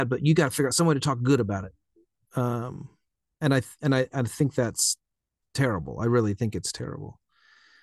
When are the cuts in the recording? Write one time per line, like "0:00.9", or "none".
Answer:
none